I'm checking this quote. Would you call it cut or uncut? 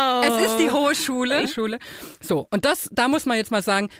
cut